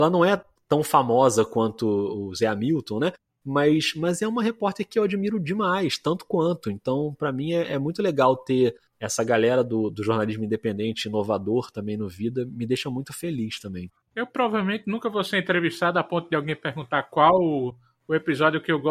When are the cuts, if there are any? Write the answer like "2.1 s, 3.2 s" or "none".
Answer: none